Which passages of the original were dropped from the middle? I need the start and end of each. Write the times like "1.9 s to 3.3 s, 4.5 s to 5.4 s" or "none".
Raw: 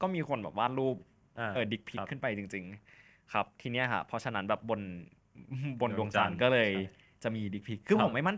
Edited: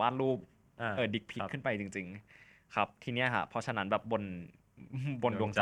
none